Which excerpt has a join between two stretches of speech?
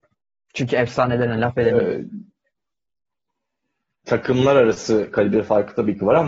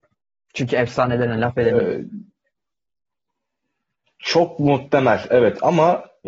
first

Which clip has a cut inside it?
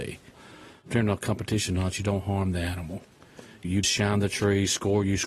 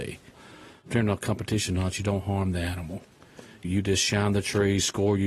first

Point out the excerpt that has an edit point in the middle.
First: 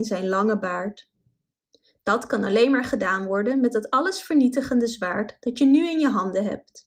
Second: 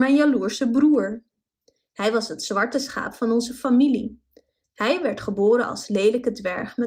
first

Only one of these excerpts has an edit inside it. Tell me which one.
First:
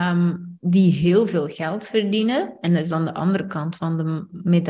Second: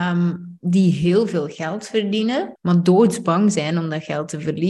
second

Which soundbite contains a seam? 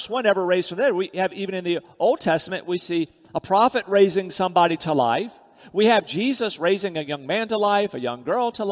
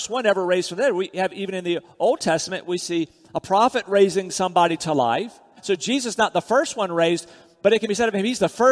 second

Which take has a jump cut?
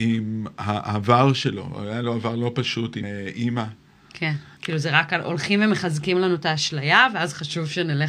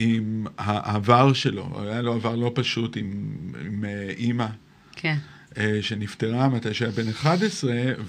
first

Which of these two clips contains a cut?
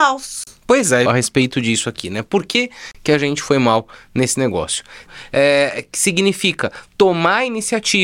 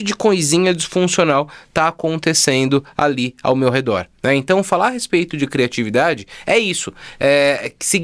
first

